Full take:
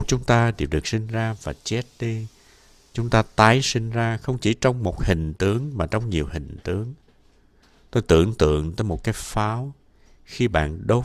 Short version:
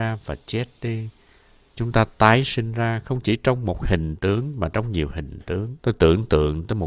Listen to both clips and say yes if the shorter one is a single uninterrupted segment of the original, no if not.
no